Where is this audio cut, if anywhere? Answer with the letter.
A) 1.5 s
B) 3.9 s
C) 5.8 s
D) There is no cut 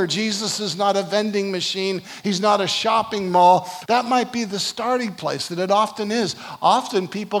B